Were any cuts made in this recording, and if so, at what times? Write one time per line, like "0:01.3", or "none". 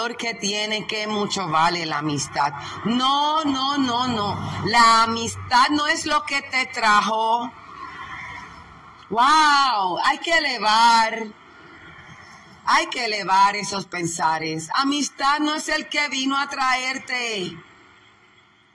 none

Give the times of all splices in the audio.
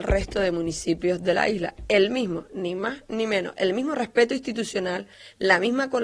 none

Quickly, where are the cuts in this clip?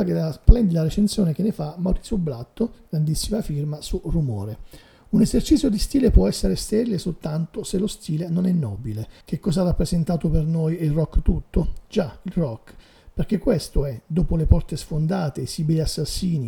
0:09.2

